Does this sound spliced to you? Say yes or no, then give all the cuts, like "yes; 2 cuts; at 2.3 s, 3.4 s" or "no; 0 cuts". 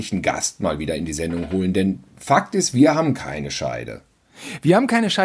no; 0 cuts